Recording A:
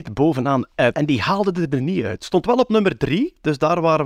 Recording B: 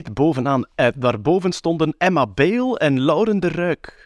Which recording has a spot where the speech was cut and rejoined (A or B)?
A